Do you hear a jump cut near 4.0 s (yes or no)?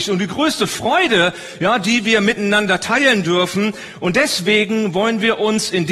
no